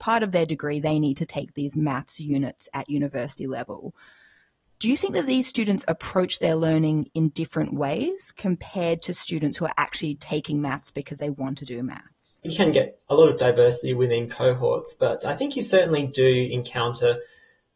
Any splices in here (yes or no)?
no